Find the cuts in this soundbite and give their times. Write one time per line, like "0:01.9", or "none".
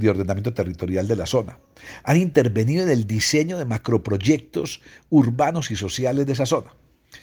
none